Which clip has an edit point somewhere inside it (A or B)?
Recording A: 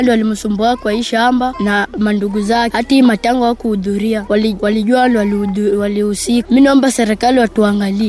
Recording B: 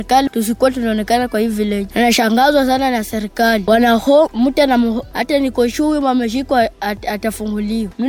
B